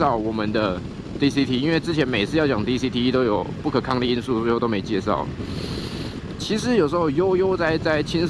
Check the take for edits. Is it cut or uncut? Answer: cut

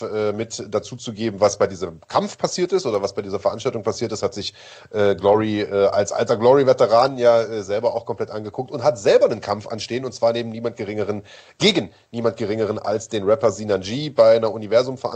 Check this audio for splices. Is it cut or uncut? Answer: uncut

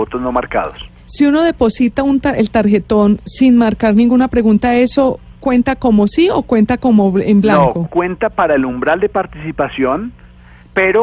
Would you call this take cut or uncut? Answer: cut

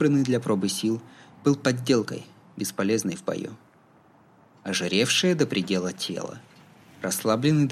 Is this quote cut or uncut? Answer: uncut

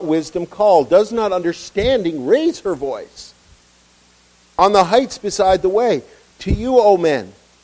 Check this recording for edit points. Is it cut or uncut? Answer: uncut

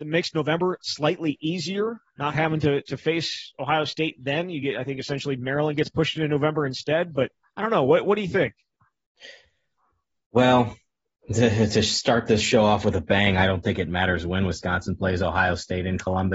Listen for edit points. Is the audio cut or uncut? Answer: uncut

